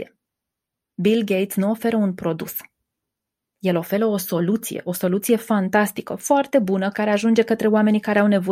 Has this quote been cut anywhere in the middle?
yes; 1 cut; at 6.9 s

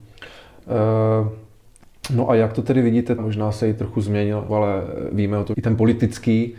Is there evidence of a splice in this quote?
yes; 3 cuts; at 3.2 s, 4.5 s, 5.5 s

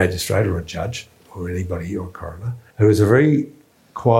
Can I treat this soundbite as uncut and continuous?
no; 1 cut; at 2.7 s

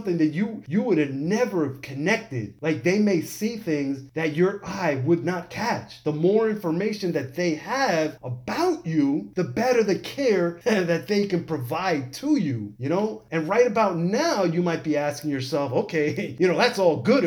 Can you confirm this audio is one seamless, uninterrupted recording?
yes; 0 cuts

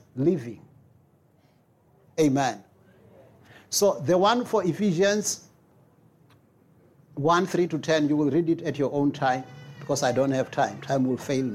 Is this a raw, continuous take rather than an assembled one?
yes; 0 cuts

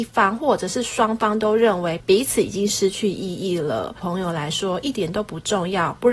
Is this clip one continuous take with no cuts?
no; 1 cut; at 4.0 s

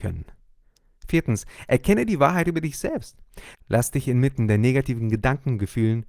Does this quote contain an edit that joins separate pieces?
yes; 1 cut; at 3.5 s

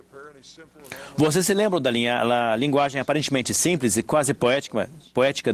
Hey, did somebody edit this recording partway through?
no; 0 cuts

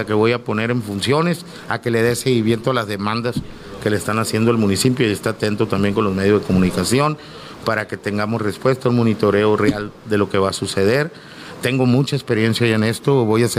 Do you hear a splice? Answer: no; 0 cuts

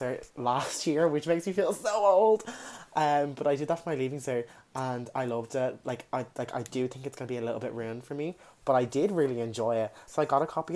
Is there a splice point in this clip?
no; 0 cuts

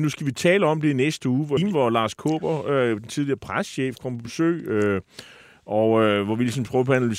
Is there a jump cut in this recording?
yes; 1 cut; at 1.6 s

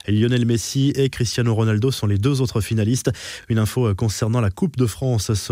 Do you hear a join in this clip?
no; 0 cuts

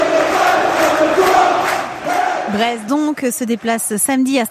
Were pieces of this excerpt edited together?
yes; 1 cut; at 2.9 s

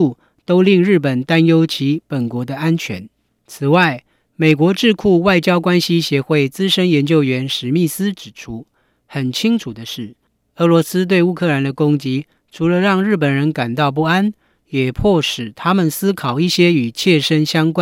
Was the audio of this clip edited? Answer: no; 0 cuts

